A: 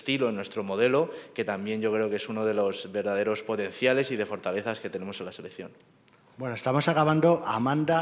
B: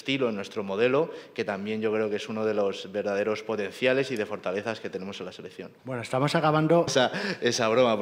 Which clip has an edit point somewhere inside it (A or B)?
B